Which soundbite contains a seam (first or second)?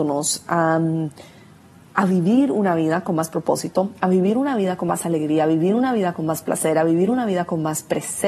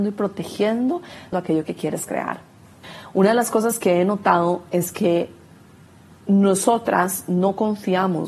second